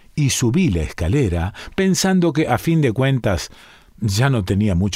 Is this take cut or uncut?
uncut